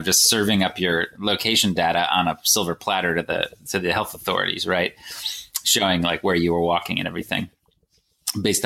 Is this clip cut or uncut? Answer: uncut